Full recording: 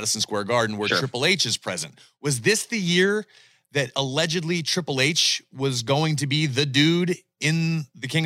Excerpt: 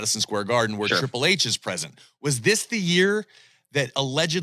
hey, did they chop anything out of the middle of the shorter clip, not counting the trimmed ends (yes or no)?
no